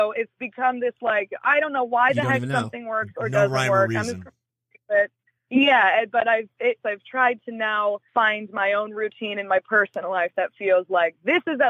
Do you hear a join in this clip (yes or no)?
yes